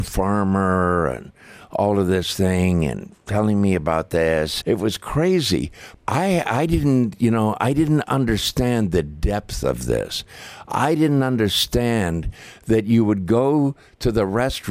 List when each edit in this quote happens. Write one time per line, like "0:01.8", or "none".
0:04.6
0:05.9